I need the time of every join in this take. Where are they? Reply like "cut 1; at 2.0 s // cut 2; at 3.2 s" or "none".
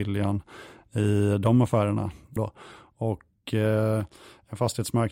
cut 1; at 2.4 s

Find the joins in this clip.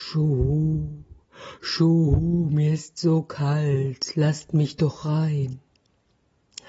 none

